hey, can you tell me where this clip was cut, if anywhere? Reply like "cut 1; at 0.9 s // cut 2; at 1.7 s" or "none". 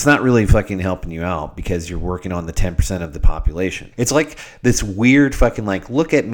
cut 1; at 3.9 s